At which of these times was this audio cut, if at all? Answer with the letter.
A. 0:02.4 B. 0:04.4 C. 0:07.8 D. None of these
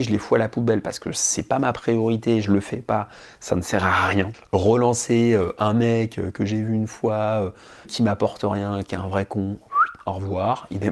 C